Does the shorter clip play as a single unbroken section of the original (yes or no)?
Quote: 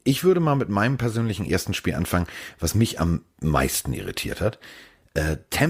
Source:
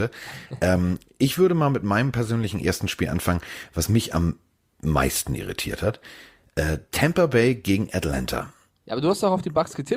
no